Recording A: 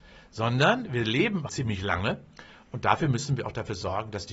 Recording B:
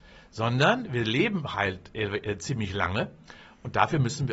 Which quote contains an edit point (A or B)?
A